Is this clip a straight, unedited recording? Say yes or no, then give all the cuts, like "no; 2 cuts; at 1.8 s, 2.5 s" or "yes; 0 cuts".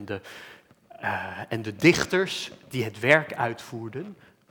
yes; 0 cuts